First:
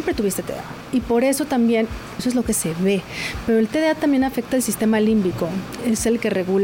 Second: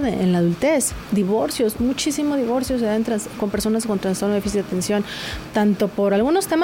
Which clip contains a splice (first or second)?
first